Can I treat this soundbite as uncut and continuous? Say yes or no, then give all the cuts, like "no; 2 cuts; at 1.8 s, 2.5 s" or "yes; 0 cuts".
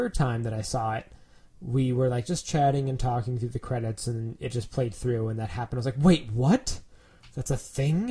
yes; 0 cuts